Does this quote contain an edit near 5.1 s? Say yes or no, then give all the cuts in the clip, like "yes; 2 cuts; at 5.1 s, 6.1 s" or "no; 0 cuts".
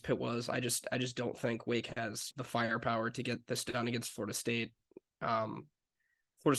no; 1 cut; at 2.3 s